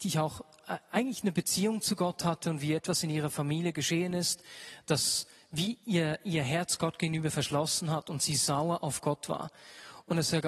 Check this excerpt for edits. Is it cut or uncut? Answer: uncut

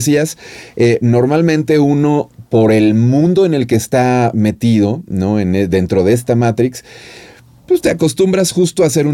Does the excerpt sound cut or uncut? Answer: uncut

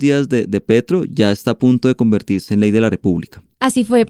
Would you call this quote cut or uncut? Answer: uncut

